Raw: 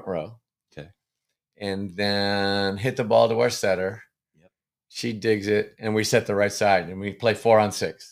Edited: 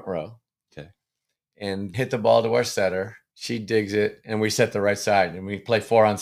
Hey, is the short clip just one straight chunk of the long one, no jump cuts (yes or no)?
no